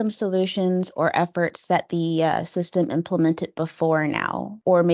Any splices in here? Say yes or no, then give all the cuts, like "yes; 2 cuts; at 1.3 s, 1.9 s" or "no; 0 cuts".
no; 0 cuts